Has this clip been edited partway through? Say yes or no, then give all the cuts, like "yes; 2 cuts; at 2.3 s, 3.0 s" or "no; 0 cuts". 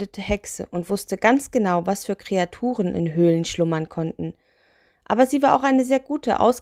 no; 0 cuts